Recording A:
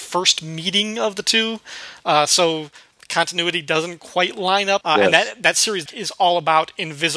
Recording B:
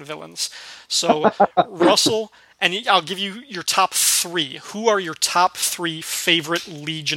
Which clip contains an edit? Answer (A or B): A